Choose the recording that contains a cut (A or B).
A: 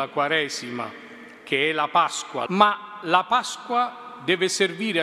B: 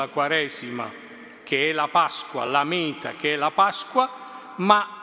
A